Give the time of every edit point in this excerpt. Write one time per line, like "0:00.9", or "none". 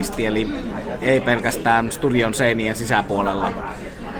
0:01.0